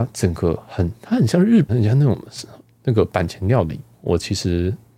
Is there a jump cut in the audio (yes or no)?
yes